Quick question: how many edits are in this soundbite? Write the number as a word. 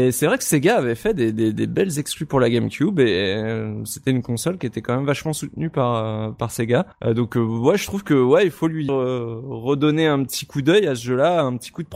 two